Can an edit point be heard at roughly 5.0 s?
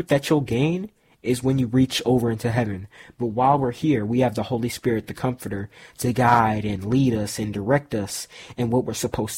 no; 0 cuts

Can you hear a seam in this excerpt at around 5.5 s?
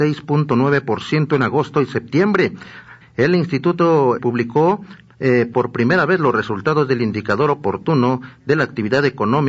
yes; 3 cuts; at 3.0 s, 4.2 s, 5.5 s

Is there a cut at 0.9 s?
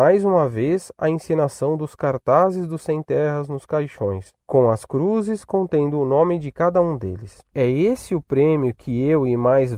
no; 1 cut; at 7.5 s

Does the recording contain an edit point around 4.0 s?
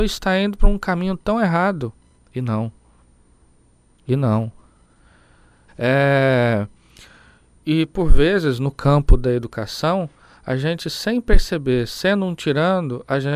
no; 2 cuts; at 2.2 s, 5.7 s

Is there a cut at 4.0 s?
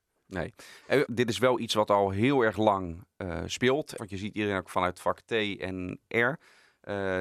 yes; 2 cuts; at 1.1 s, 4.0 s

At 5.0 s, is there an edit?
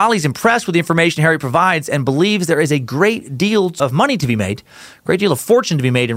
no; 1 cut; at 3.8 s

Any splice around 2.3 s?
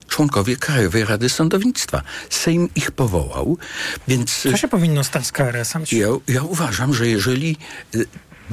no; 2 cuts; at 4.0 s, 5.8 s

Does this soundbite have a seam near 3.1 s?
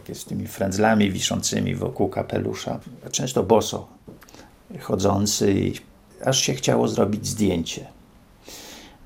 no; 0 cuts

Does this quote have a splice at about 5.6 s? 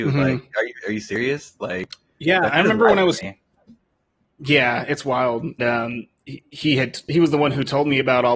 yes; 1 cut; at 5.6 s

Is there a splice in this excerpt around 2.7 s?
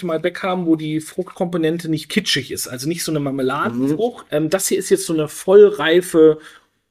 no; 1 cut; at 4.3 s

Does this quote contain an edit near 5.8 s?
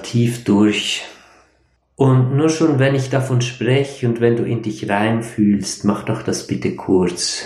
no; 1 cut; at 1.8 s

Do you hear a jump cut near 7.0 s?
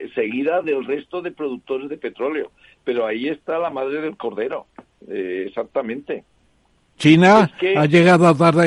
yes; 1 cut; at 7.0 s

